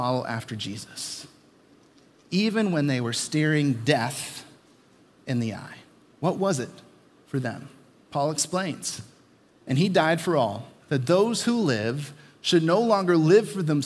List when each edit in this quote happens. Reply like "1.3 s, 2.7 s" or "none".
none